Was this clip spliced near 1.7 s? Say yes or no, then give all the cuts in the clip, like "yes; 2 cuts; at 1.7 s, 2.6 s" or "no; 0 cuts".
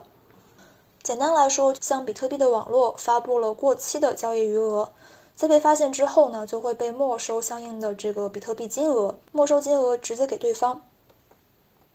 yes; 2 cuts; at 1.7 s, 9.2 s